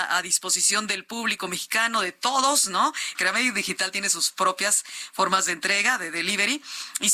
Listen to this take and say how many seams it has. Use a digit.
1